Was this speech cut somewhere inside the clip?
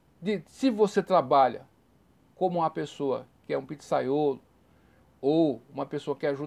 no; 0 cuts

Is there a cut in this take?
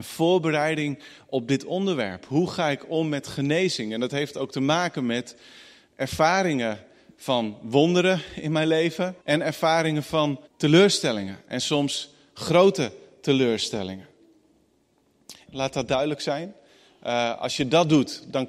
yes; 3 cuts; at 9.2 s, 10.5 s, 15.5 s

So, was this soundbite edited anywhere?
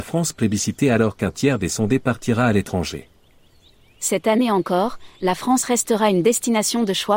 no; 0 cuts

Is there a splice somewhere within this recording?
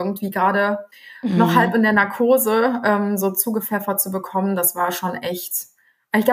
no; 0 cuts

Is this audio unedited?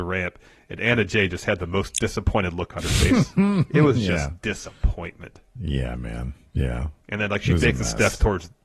yes; 0 cuts

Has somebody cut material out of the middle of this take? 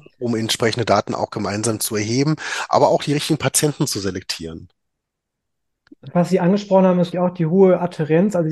yes; 1 cut; at 7.1 s

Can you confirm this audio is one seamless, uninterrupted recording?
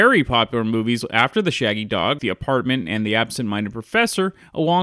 no; 1 cut; at 2.2 s

